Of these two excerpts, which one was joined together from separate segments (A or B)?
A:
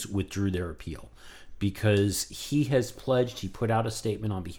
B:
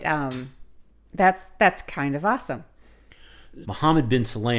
B